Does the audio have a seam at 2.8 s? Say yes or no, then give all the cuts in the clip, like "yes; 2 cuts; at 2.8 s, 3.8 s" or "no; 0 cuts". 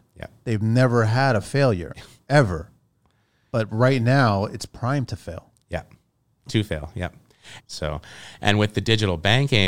no; 2 cuts; at 6.5 s, 7.6 s